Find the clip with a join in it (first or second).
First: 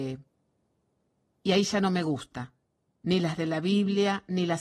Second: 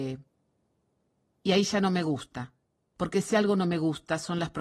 first